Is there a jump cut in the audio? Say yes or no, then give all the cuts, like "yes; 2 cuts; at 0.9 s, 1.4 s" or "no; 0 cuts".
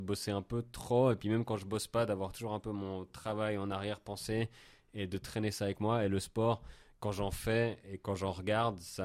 no; 0 cuts